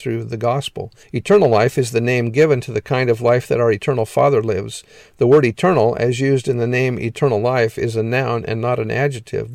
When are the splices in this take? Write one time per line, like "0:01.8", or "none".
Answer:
0:01.0